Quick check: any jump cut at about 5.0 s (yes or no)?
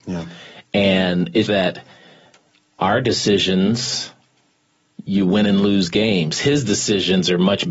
no